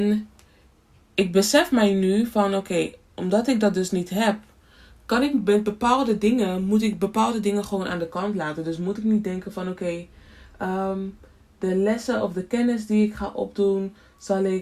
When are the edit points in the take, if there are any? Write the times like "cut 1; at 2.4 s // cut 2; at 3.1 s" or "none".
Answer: none